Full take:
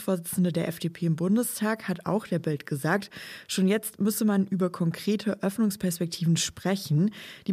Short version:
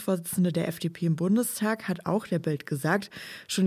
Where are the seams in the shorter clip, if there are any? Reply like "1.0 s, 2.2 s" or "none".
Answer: none